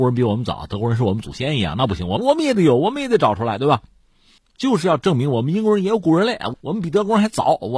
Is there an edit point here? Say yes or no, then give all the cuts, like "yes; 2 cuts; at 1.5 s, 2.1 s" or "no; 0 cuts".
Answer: yes; 1 cut; at 4.4 s